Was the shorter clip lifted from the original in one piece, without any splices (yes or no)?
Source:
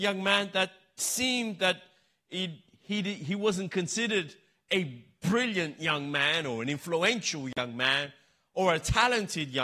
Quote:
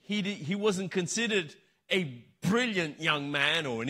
yes